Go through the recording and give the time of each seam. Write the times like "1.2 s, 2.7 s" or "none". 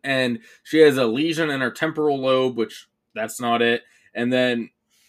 none